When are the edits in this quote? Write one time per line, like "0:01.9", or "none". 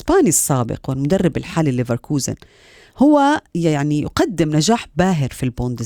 0:03.5